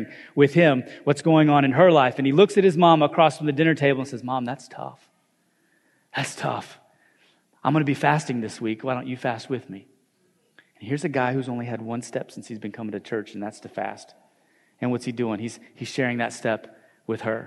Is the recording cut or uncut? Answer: uncut